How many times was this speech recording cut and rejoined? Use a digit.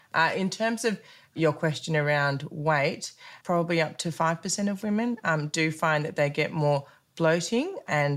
1